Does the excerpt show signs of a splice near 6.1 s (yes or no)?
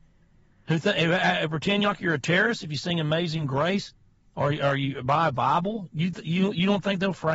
no